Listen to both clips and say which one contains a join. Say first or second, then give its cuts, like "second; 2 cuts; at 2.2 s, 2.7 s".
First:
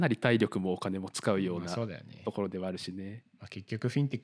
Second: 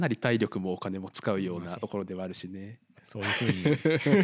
second; 2 cuts; at 1.7 s, 3.0 s